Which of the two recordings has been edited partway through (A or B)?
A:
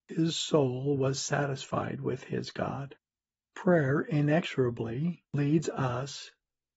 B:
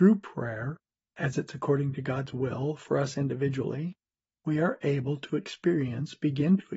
A